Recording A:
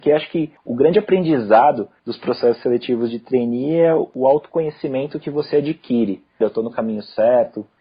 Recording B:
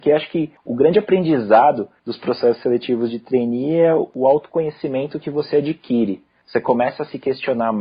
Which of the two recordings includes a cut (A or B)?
A